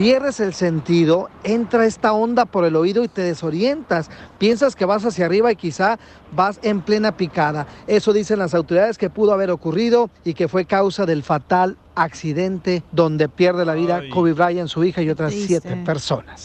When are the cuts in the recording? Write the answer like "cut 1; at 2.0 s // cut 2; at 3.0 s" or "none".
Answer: none